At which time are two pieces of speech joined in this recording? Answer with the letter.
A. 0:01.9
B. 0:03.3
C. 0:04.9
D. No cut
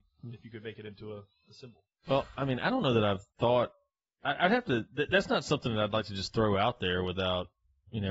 B